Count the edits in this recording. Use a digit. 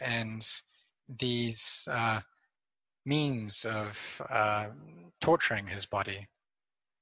0